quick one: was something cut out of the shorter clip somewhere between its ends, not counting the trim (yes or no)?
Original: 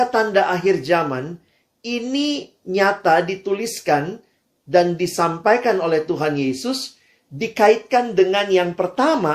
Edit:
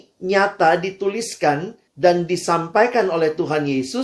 yes